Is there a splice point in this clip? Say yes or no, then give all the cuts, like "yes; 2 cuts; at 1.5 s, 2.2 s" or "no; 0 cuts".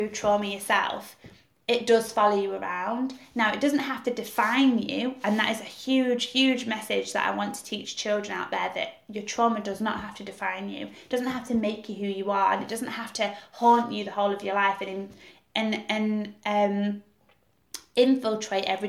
no; 0 cuts